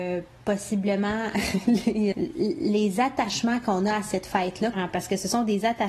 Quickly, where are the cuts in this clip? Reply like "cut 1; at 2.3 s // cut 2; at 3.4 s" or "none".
cut 1; at 2.1 s // cut 2; at 4.7 s